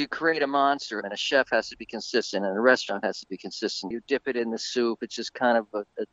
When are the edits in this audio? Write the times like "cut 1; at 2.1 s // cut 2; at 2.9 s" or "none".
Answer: cut 1; at 1.0 s // cut 2; at 3.9 s